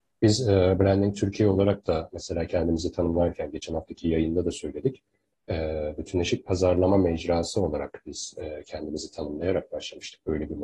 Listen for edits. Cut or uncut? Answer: uncut